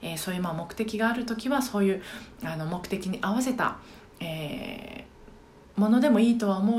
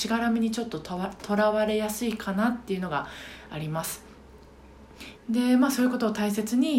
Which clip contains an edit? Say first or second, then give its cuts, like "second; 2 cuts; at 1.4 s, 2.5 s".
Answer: second; 1 cut; at 5.2 s